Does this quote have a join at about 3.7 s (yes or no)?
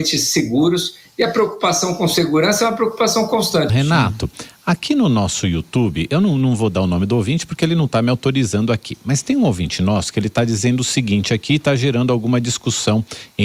yes